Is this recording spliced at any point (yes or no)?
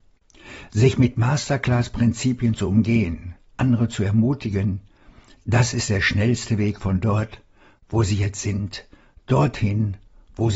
yes